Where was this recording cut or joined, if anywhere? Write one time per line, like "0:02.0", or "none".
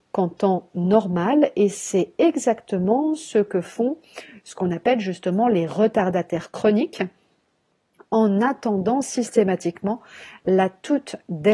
none